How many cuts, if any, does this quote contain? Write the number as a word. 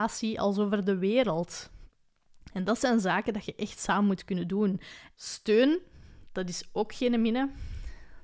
one